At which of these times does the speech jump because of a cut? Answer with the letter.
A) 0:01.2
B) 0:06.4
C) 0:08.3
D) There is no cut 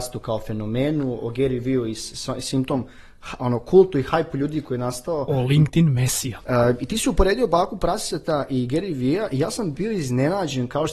B